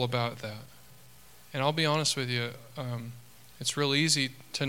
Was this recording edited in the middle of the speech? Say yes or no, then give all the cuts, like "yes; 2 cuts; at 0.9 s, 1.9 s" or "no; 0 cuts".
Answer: no; 0 cuts